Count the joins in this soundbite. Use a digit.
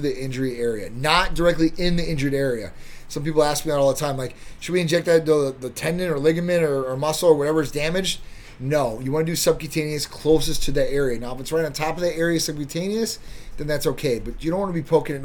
0